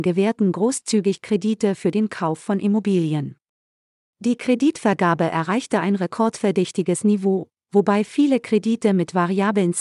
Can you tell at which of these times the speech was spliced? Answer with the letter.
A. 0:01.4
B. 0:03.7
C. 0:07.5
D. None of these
D